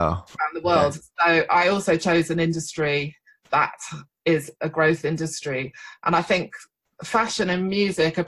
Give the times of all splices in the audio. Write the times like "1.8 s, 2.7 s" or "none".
none

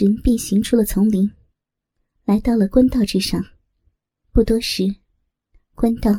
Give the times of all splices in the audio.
4.2 s

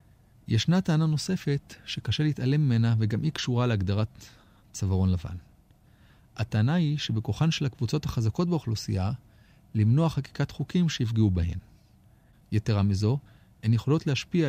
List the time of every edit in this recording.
none

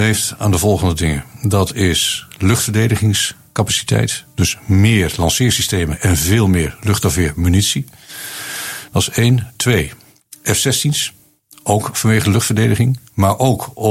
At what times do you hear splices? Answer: none

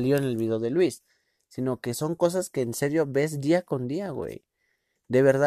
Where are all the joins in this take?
none

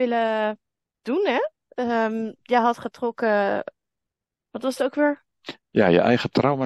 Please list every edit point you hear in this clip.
none

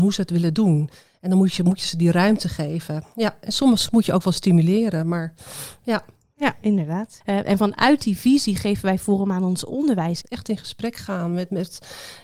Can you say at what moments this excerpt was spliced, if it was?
7.2 s, 10.2 s

